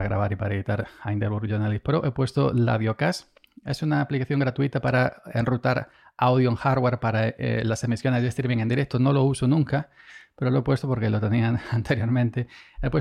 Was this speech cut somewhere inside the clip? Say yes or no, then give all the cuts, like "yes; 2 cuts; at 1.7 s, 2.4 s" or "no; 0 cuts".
no; 0 cuts